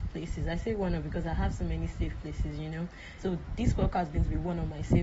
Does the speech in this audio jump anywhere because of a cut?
yes; 1 cut; at 3.2 s

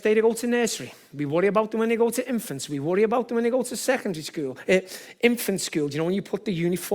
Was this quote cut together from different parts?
no; 0 cuts

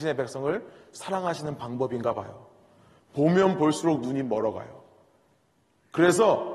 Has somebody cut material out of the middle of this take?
yes; 1 cut; at 3.0 s

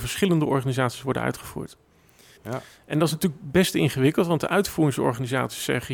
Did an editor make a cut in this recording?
yes; 1 cut; at 2.4 s

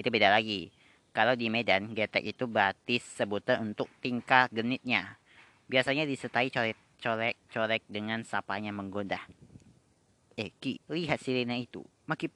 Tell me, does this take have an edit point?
yes; 1 cut; at 10.8 s

